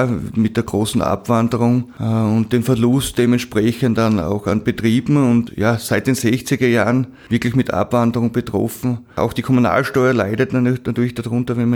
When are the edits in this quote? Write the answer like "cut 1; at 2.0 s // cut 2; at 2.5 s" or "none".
none